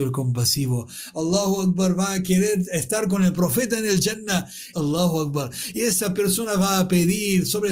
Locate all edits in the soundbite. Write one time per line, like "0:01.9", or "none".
0:01.1
0:04.7